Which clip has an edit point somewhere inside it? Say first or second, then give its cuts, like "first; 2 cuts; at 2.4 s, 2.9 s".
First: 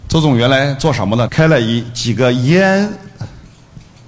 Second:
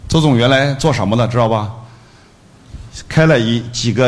first; 1 cut; at 1.3 s